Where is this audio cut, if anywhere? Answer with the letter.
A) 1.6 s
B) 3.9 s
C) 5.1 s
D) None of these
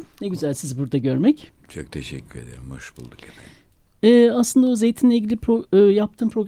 D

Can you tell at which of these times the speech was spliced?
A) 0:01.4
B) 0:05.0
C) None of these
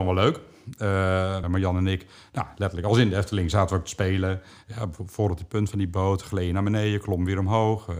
A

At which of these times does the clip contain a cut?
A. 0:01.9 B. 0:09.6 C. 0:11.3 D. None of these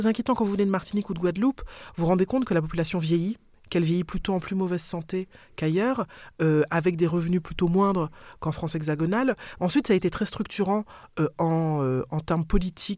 B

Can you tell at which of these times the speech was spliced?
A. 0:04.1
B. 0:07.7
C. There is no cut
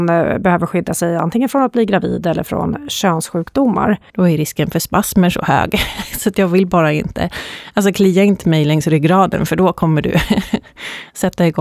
A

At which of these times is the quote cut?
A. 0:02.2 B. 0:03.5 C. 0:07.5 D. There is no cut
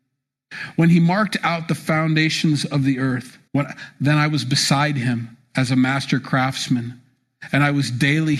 B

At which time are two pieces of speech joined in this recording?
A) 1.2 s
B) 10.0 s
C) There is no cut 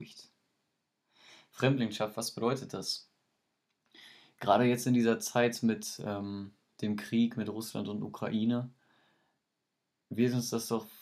C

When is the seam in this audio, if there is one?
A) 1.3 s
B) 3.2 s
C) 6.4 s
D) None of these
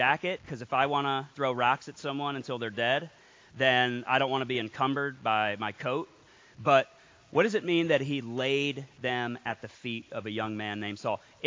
A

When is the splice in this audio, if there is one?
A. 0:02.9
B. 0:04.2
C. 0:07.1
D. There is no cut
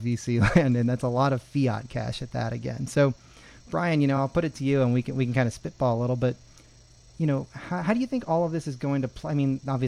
D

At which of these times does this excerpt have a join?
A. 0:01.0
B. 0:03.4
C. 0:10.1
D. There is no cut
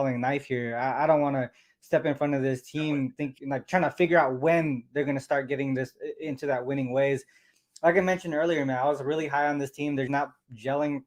C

